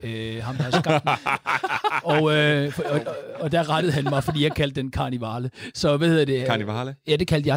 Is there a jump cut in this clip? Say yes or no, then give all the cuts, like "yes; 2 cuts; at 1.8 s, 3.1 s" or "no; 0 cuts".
no; 0 cuts